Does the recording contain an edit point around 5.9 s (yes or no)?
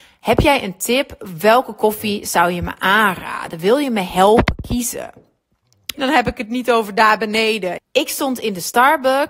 yes